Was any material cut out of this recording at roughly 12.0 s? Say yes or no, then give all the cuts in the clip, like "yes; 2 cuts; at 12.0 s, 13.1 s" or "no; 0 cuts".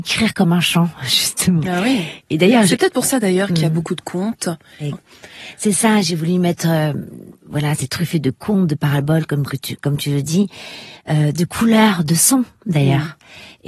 no; 1 cut; at 4.9 s